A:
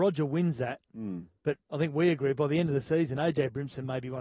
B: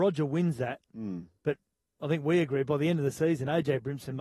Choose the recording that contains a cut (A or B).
A